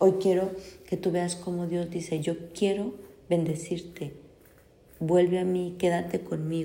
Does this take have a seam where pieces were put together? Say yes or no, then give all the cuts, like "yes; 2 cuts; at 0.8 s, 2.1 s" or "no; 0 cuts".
no; 0 cuts